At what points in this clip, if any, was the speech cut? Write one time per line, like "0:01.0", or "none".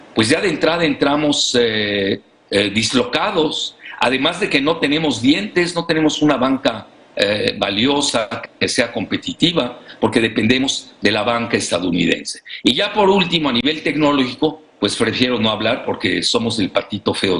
none